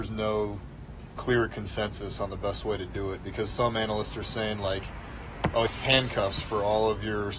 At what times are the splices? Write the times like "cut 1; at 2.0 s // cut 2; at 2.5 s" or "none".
cut 1; at 5.7 s